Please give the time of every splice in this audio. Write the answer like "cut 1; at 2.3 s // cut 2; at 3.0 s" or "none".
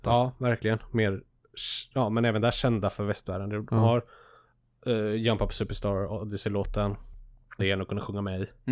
cut 1; at 7.6 s

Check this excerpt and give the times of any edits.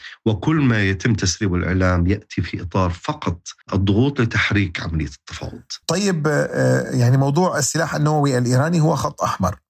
cut 1; at 3.6 s // cut 2; at 5.8 s

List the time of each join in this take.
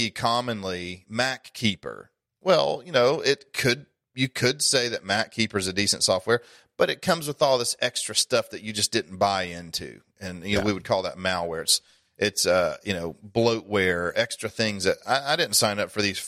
none

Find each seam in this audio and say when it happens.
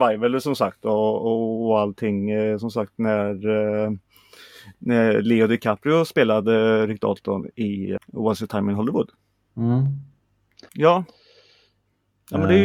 cut 1; at 8.0 s // cut 2; at 10.7 s

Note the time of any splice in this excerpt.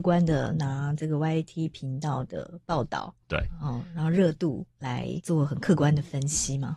cut 1; at 3.2 s

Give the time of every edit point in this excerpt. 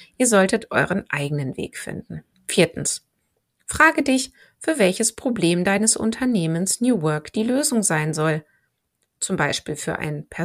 cut 1; at 2.3 s

